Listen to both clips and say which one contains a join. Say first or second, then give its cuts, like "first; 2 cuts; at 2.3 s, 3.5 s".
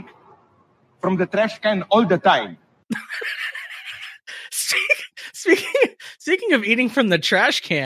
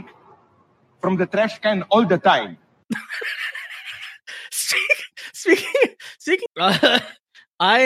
second; 1 cut; at 6.5 s